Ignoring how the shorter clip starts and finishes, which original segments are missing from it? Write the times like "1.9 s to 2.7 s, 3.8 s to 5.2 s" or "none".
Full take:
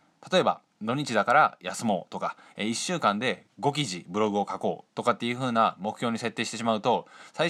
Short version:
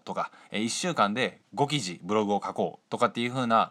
none